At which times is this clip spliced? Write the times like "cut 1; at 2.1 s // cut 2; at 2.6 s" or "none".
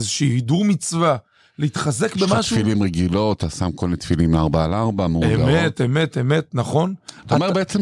cut 1; at 6.1 s